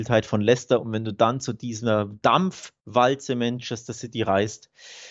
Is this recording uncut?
yes; 0 cuts

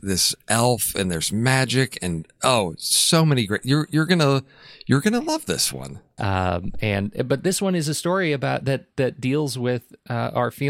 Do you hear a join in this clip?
yes; 1 cut; at 6.2 s

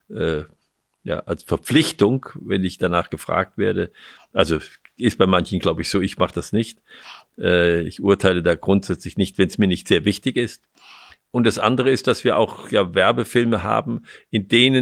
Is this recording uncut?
yes; 0 cuts

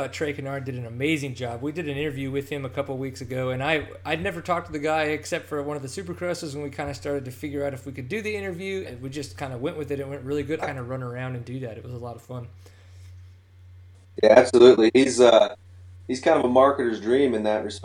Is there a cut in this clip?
yes; 2 cuts; at 8.8 s, 10.6 s

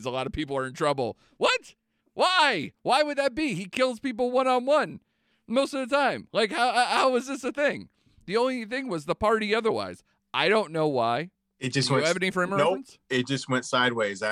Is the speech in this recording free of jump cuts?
yes; 0 cuts

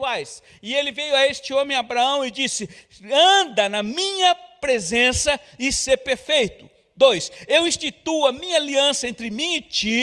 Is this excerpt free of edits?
yes; 0 cuts

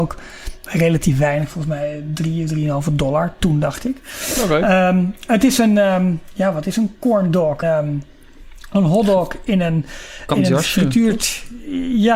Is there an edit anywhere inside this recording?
yes; 2 cuts; at 7.6 s, 10.3 s

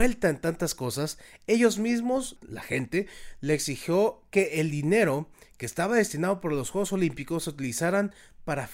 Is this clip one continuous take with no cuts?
no; 1 cut; at 2.4 s

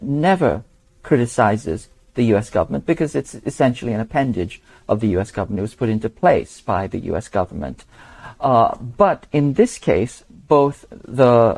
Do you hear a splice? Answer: no; 0 cuts

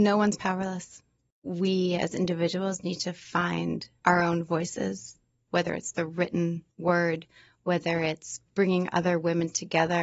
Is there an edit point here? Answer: yes; 2 cuts; at 5.5 s, 6.7 s

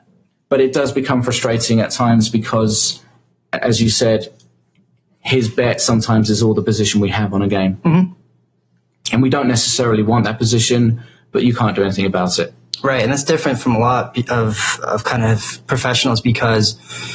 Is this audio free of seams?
yes; 0 cuts

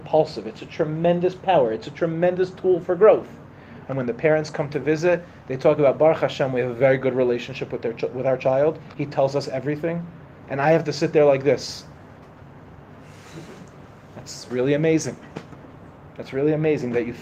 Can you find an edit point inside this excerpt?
yes; 1 cut; at 3.8 s

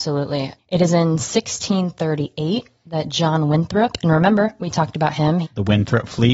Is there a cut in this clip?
yes; 1 cut; at 5.4 s

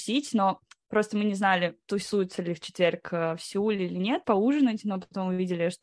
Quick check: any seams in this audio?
yes; 1 cut; at 4.2 s

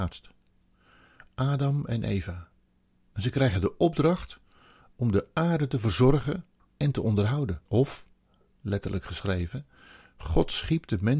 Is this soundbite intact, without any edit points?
no; 1 cut; at 7.7 s

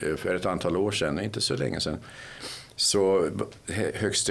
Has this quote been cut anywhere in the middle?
no; 0 cuts

